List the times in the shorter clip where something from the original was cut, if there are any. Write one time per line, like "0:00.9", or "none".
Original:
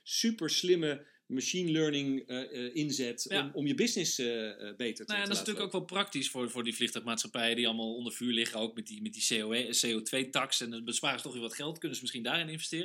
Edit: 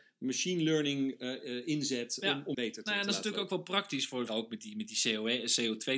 0:02.5
0:04.3